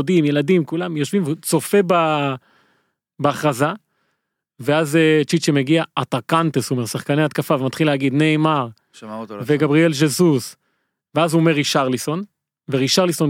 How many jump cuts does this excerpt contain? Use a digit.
0